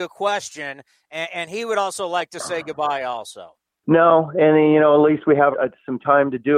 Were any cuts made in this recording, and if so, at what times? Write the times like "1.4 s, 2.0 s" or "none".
3.8 s, 5.5 s